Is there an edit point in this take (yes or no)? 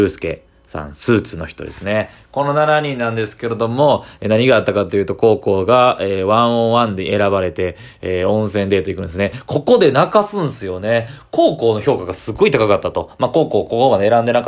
no